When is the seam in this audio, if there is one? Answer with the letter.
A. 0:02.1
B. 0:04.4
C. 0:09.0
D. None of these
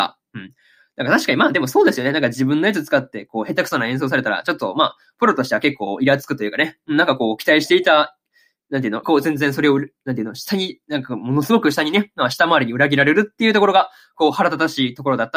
C